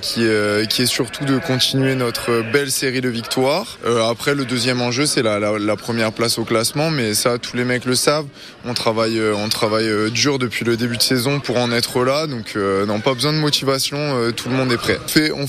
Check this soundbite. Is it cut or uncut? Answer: cut